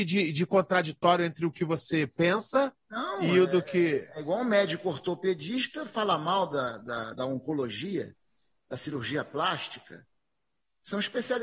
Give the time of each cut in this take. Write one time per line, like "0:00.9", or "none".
none